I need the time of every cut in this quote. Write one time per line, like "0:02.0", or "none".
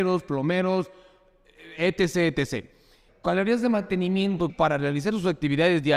0:03.1
0:04.5